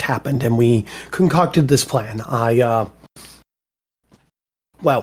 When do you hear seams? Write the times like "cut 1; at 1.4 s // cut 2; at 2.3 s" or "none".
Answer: none